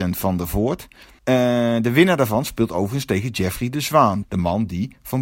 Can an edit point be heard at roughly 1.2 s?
yes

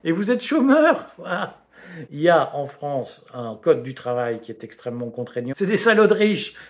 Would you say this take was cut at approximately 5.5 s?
yes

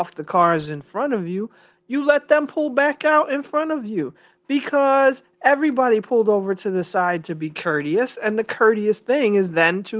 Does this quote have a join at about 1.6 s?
no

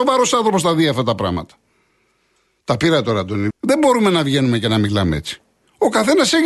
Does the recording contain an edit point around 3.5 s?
yes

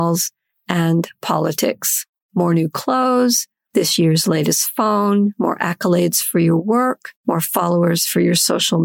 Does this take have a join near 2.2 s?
yes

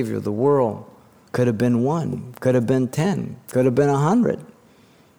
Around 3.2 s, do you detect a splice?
no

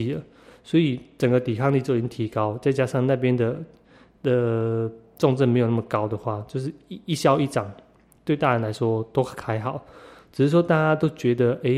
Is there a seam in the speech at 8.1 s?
no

